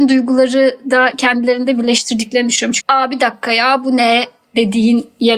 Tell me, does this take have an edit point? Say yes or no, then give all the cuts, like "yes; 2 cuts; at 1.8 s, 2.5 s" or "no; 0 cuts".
yes; 1 cut; at 2.8 s